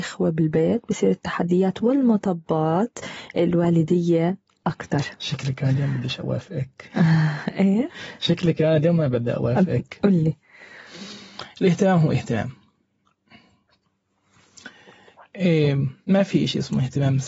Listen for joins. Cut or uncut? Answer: uncut